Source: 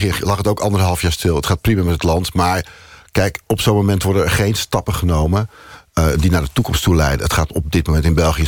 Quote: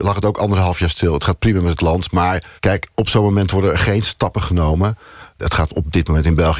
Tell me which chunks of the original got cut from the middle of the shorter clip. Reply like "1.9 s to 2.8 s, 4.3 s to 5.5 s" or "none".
2.8 s to 3.1 s, 5.9 s to 7.2 s

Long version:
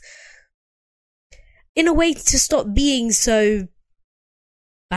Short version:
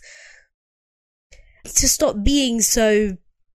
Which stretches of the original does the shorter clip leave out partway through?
1.6 s to 2.2 s

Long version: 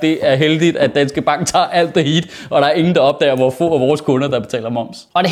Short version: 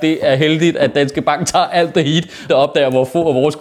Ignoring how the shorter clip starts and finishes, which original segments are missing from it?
2.5 s to 2.9 s

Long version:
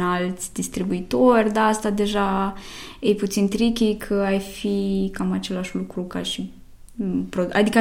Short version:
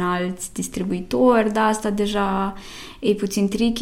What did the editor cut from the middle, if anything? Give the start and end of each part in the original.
none

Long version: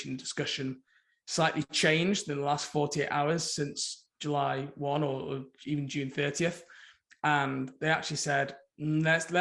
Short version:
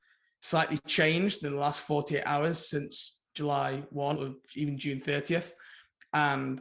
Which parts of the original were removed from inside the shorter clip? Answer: 5.0 s to 5.2 s

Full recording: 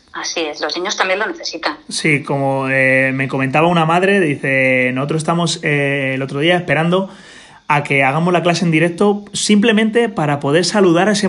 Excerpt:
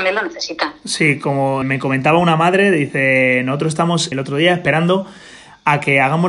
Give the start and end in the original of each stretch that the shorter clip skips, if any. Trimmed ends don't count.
2.7 s to 3.1 s, 5.6 s to 6.1 s

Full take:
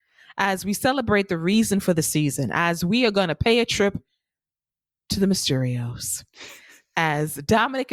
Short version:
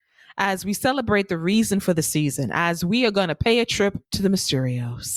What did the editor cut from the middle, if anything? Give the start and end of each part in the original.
4.0 s to 5.0 s

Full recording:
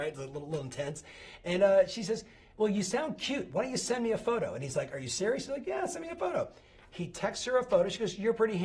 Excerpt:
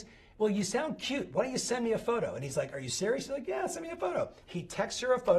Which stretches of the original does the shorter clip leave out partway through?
6.6 s to 6.9 s

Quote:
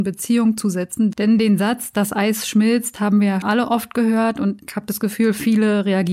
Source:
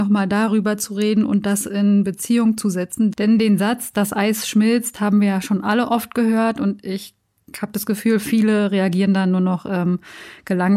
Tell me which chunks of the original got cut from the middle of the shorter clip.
5.4 s to 5.6 s, 6.8 s to 7.5 s

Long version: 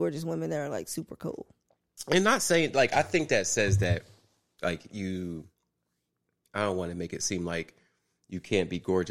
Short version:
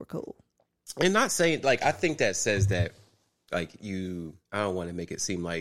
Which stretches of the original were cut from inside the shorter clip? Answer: 5.6 s to 6.5 s

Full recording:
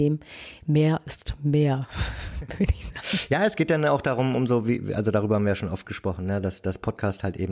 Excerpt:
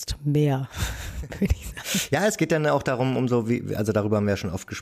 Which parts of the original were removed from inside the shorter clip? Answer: none

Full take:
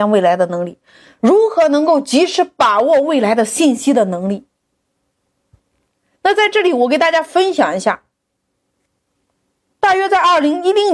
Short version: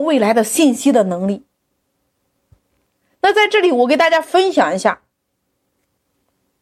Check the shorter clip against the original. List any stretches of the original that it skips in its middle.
none

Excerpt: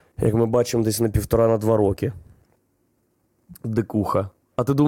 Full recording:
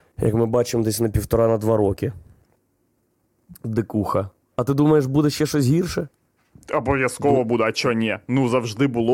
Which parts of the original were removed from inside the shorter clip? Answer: none

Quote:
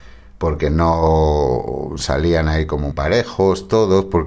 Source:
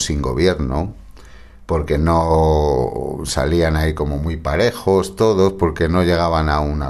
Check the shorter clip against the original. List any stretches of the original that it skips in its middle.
4.2 s to 4.4 s

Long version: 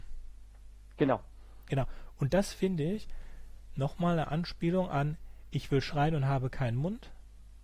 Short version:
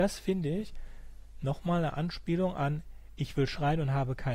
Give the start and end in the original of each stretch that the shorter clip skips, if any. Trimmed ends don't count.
none

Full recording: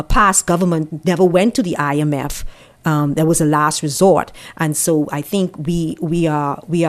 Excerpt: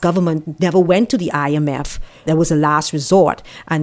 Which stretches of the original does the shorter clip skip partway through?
2.7 s to 3.1 s

